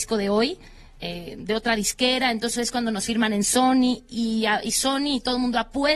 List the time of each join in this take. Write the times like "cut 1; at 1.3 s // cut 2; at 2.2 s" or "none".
none